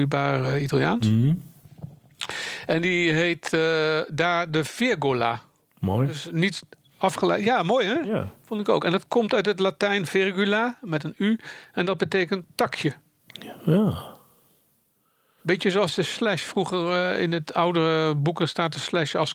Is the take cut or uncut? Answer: uncut